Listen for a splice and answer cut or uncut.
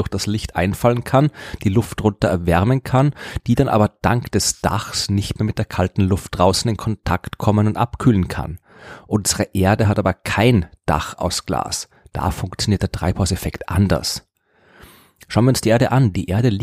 uncut